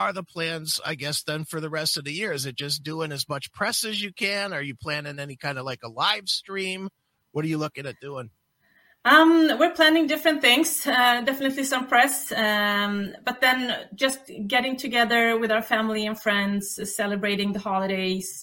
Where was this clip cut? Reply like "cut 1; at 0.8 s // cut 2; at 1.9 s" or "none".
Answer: none

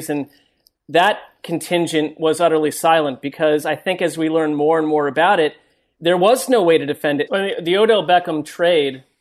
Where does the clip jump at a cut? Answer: cut 1; at 7.3 s

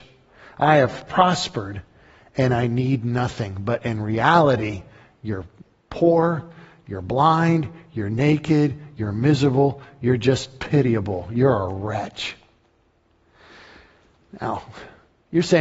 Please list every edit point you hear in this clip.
none

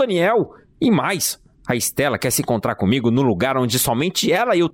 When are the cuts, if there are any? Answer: none

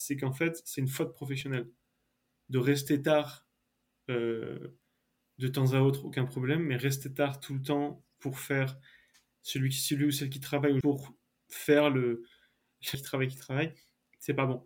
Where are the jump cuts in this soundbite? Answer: cut 1; at 10.8 s // cut 2; at 12.9 s

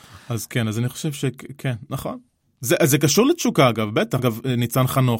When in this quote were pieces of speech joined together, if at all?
cut 1; at 4.2 s

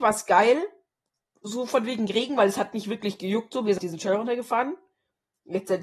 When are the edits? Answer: cut 1; at 3.8 s

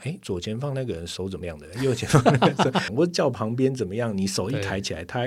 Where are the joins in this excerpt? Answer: cut 1; at 1.4 s // cut 2; at 2.9 s

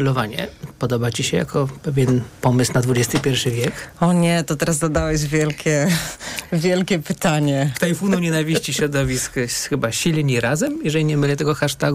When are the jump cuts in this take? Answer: cut 1; at 7.7 s

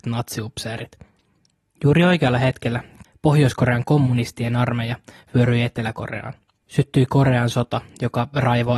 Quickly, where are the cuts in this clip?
cut 1; at 3.0 s

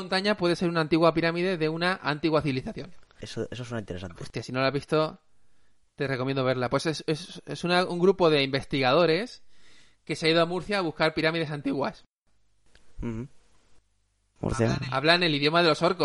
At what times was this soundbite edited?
cut 1; at 3.2 s // cut 2; at 14.4 s

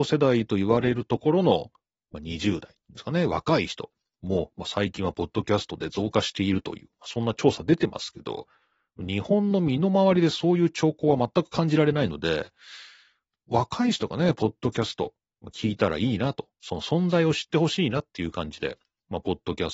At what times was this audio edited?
none

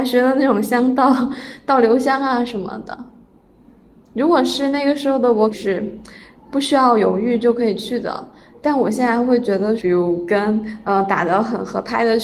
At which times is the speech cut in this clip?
cut 1; at 5.5 s // cut 2; at 9.8 s

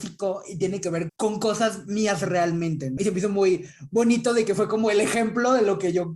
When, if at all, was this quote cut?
cut 1; at 1.1 s // cut 2; at 3.0 s

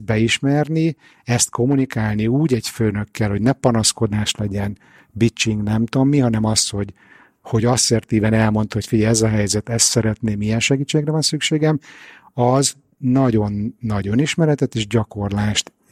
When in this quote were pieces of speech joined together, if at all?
none

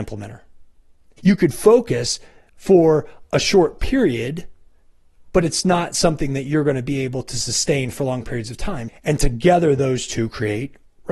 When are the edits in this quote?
cut 1; at 1.2 s // cut 2; at 8.9 s

